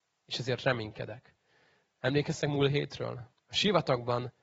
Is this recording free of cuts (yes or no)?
no